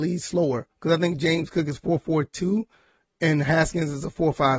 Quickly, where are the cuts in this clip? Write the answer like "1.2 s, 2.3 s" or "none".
none